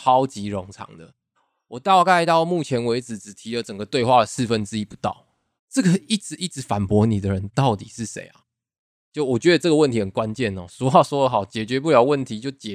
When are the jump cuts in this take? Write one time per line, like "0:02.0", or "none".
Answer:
0:05.6